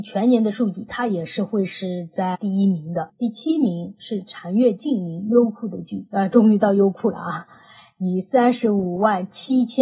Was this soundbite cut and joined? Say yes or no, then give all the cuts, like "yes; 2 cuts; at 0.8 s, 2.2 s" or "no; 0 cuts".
yes; 1 cut; at 3.1 s